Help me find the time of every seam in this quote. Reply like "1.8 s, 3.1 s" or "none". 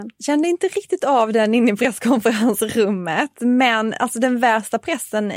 none